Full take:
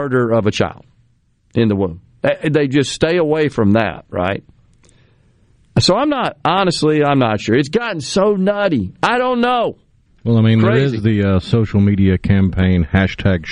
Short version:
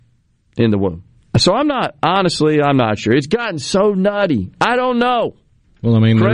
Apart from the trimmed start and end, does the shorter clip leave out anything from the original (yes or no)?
yes